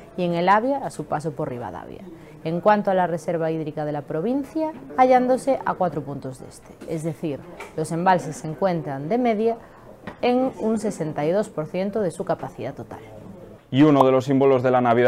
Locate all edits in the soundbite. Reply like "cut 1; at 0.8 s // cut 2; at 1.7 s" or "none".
cut 1; at 4.9 s